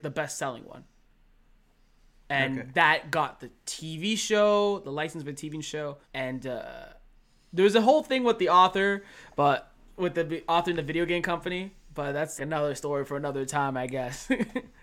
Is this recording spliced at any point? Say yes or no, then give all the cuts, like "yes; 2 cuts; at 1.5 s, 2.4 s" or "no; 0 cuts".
yes; 2 cuts; at 6.0 s, 12.4 s